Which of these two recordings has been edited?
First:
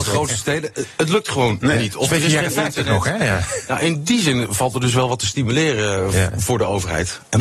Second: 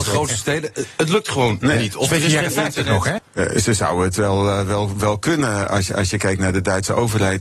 second; 1 cut; at 3.2 s

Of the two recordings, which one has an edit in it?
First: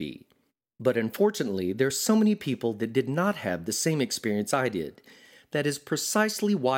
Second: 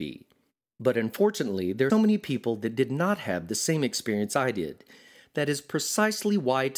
second; 1 cut; at 1.9 s

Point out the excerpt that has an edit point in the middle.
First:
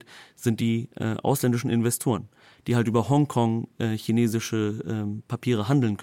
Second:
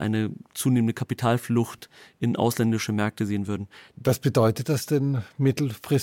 second; 1 cut; at 3.9 s

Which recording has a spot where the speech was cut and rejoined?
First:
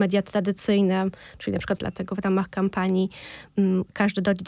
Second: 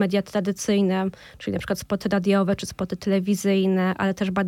first; 1 cut; at 1.8 s

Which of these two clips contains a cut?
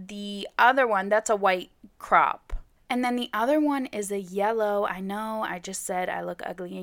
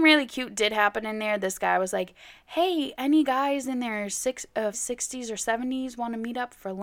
second; 1 cut; at 4.7 s

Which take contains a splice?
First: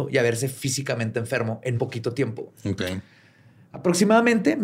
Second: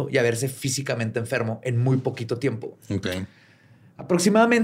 first; 1 cut; at 1.8 s

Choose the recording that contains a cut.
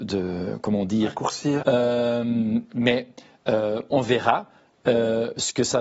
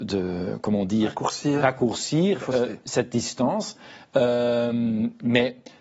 first; 1 cut; at 1.6 s

